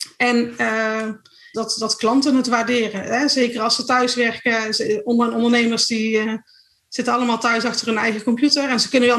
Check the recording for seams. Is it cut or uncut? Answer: cut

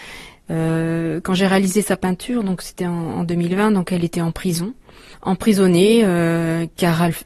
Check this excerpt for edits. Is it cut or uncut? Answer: uncut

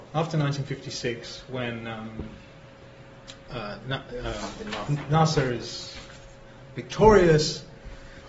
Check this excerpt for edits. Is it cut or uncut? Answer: cut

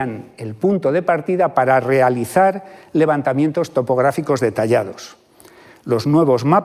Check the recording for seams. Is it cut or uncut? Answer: uncut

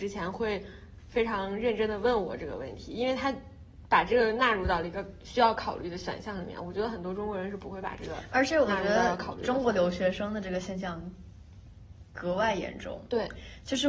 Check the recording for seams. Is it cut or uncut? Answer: uncut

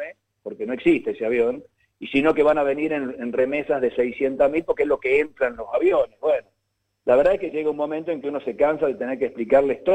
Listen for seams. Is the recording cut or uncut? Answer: uncut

